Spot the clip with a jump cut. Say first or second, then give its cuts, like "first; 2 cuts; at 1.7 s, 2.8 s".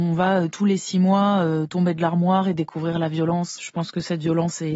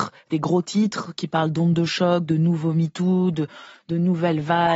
first; 1 cut; at 3.6 s